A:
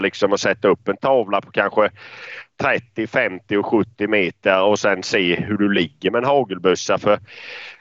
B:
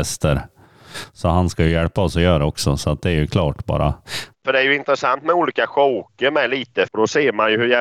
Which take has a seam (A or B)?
B